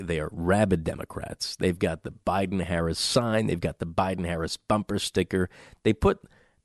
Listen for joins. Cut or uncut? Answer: uncut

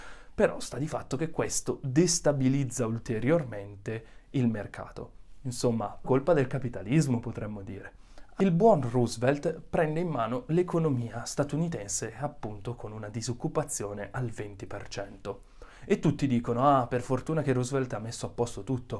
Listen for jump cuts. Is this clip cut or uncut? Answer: cut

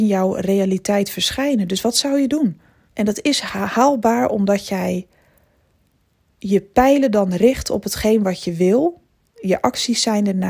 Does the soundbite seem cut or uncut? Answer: cut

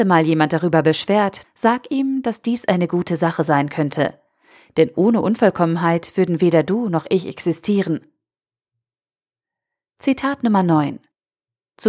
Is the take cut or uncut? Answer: cut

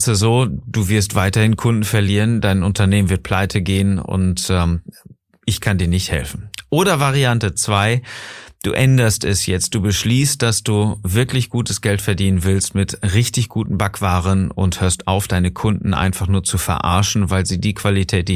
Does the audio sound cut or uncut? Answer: uncut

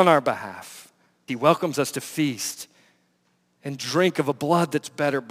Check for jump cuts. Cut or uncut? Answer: cut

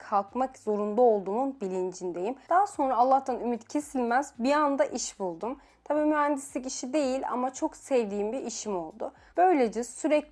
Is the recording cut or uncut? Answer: cut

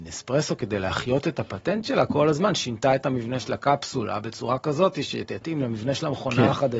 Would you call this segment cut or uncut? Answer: uncut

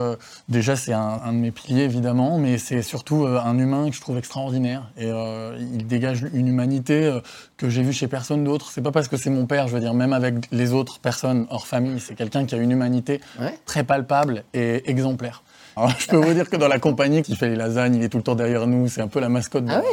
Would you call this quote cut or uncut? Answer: cut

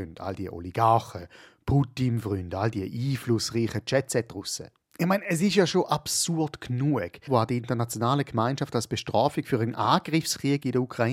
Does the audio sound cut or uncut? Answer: cut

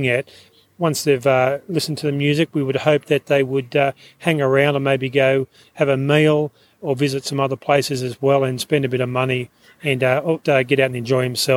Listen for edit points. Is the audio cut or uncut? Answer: cut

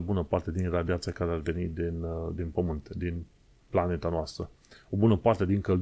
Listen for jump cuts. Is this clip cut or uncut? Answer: uncut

